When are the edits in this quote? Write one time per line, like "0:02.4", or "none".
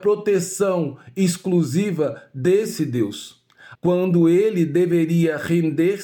0:03.8